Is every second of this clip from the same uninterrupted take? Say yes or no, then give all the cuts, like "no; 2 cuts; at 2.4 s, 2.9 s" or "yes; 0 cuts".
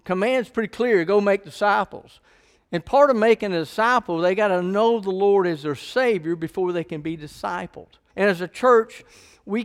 no; 1 cut; at 8.1 s